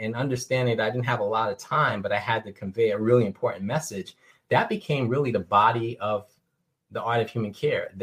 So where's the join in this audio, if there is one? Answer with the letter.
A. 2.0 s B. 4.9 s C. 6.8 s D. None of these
D